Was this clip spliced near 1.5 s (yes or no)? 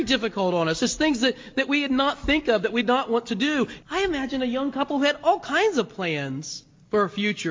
no